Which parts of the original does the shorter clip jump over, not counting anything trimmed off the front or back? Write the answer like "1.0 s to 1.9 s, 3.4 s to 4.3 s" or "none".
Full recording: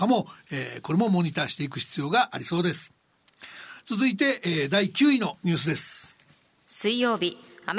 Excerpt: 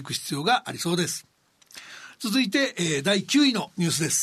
none